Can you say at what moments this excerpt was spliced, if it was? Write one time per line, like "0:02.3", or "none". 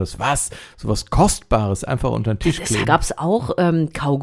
0:02.8